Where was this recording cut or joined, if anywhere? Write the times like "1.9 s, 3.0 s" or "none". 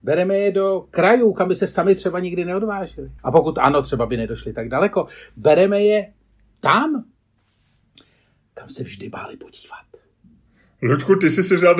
3.2 s